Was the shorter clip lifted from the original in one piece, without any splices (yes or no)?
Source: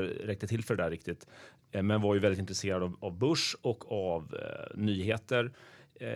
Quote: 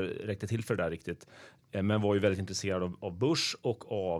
yes